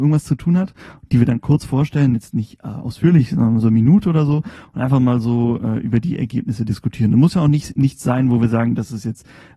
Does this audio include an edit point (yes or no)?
no